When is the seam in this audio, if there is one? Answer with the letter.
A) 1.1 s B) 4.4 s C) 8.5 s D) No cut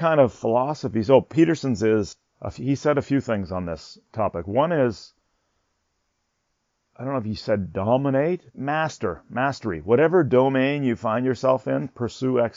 C